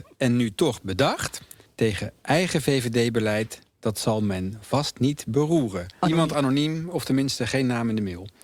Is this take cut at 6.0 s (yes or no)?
yes